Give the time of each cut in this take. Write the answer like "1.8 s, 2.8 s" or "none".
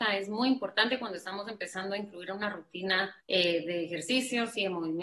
3.2 s